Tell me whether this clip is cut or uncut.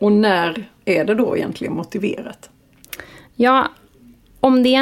uncut